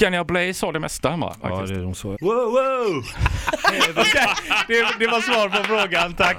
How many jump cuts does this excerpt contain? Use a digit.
1